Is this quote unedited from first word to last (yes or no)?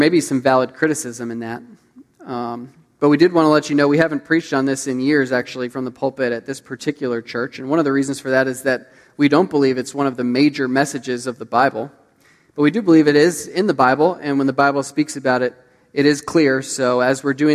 yes